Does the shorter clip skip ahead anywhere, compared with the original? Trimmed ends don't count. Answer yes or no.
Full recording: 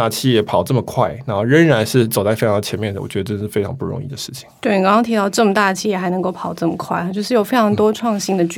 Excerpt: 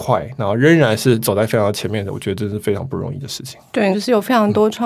yes